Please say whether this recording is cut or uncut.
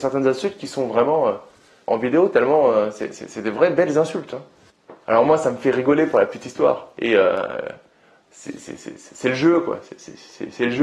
cut